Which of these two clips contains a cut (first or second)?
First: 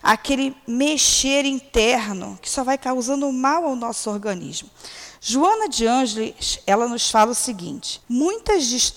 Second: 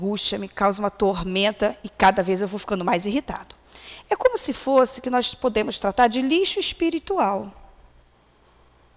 first